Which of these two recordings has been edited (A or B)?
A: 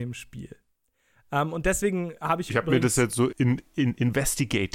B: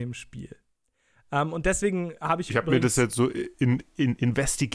A